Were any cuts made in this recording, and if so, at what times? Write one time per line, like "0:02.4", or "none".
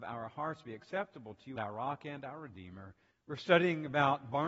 0:01.6
0:03.1